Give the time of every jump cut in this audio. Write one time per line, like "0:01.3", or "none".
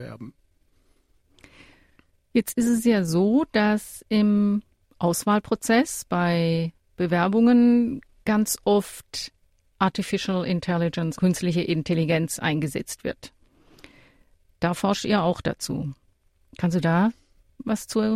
0:11.2